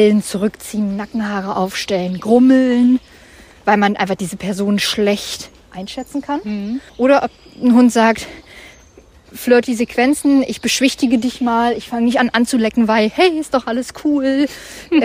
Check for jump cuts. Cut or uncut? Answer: cut